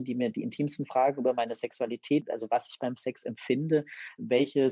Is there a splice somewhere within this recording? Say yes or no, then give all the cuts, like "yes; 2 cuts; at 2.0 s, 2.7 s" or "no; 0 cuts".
no; 0 cuts